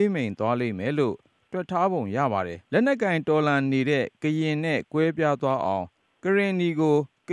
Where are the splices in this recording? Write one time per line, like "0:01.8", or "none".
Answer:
0:02.7